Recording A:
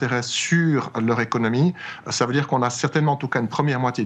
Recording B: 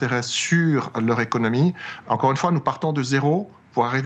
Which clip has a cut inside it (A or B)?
B